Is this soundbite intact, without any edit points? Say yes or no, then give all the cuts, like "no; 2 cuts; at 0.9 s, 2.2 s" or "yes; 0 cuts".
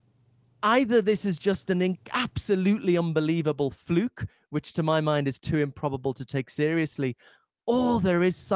yes; 0 cuts